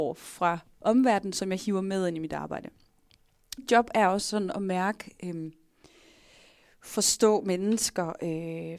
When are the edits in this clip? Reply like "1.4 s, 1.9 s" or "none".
3.6 s